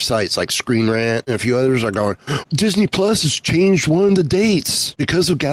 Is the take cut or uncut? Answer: cut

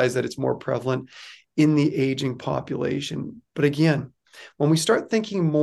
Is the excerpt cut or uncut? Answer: uncut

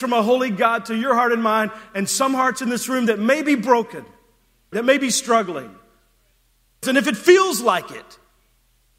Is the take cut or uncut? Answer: cut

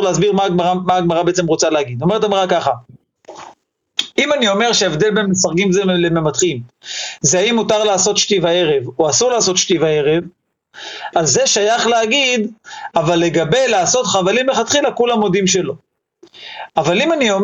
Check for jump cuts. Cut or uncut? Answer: cut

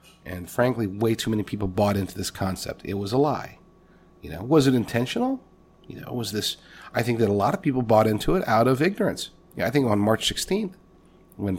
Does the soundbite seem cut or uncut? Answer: cut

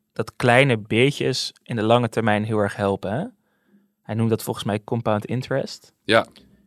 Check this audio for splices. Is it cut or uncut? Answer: uncut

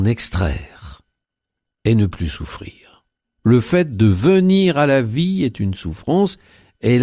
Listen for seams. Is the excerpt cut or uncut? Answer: cut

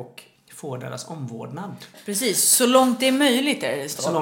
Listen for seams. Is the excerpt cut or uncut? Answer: uncut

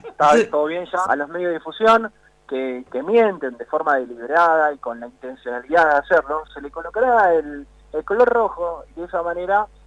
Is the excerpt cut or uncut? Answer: cut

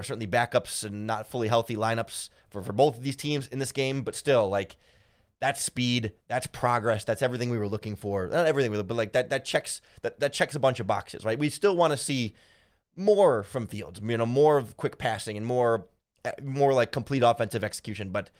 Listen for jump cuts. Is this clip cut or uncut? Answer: uncut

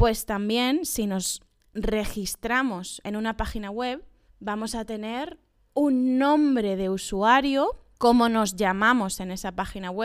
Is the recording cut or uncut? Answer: uncut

